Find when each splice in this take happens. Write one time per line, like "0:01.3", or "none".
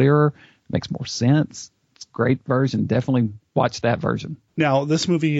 0:03.5